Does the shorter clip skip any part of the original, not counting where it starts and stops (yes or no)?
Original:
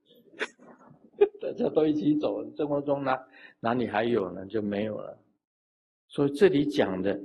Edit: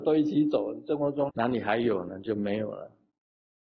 yes